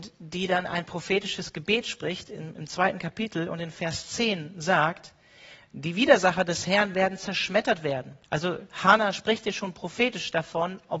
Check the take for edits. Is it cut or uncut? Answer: cut